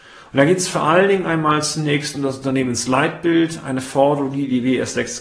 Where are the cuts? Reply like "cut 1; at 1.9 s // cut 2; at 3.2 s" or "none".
none